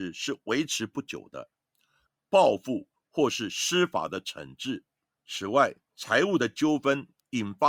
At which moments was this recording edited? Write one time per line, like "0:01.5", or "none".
0:02.2
0:05.2